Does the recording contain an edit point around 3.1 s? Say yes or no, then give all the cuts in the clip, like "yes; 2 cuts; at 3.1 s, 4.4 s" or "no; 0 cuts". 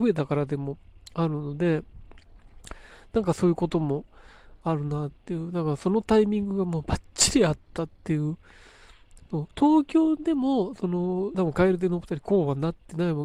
no; 2 cuts; at 9.5 s, 11.3 s